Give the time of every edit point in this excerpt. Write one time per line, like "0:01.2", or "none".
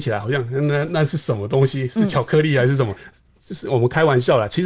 0:03.0